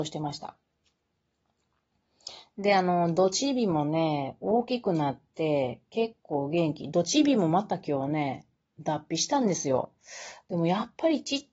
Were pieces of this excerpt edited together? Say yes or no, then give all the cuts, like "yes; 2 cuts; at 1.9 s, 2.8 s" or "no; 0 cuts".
no; 0 cuts